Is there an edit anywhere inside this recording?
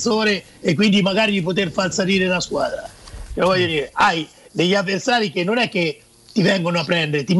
yes; 1 cut; at 3.3 s

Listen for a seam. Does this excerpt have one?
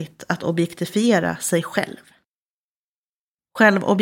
no; 0 cuts

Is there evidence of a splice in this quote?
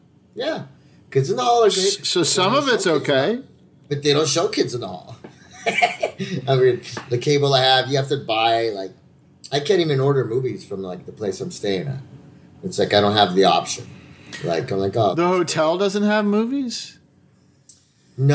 no; 0 cuts

